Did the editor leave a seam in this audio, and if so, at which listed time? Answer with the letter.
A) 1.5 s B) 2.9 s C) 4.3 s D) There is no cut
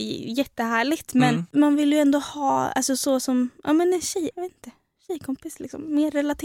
C